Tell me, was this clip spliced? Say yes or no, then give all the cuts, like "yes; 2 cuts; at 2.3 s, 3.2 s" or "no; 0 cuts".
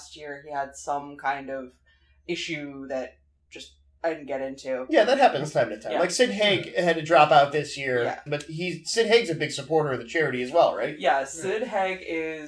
yes; 1 cut; at 8.3 s